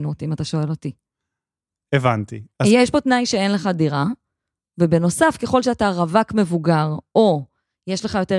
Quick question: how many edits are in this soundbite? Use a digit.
0